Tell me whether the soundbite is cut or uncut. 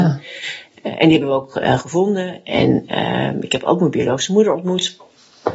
uncut